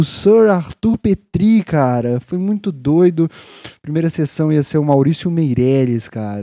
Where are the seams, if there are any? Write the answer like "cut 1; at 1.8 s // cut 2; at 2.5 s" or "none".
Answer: none